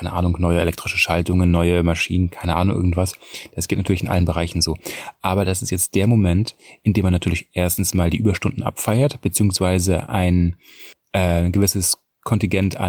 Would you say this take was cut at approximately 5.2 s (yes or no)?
no